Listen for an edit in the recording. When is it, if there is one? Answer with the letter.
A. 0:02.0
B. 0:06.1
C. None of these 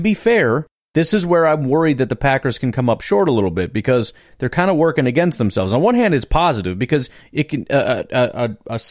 C